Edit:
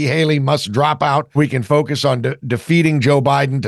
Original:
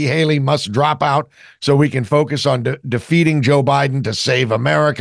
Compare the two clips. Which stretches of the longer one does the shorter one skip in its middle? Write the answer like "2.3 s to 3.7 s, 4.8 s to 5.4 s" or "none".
1.4 s to 1.8 s